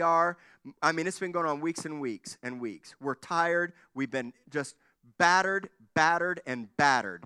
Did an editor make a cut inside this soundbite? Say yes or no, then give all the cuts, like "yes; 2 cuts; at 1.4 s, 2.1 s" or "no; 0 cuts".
no; 0 cuts